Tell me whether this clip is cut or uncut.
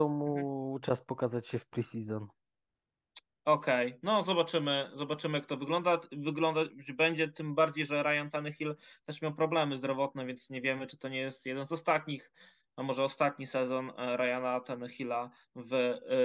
uncut